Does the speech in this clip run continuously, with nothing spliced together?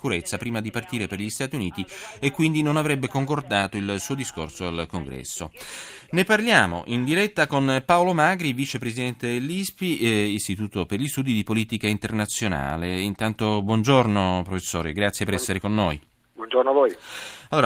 yes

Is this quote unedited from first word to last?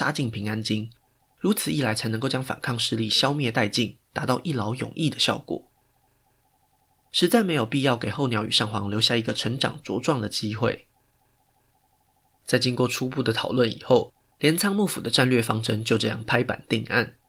no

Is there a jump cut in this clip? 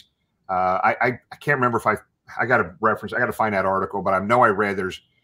no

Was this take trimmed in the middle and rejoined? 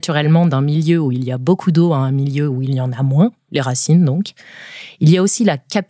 no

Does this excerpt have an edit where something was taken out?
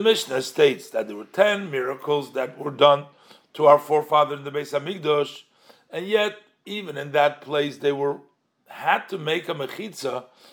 no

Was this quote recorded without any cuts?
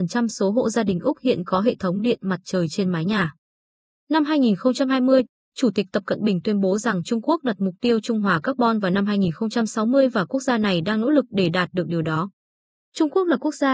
yes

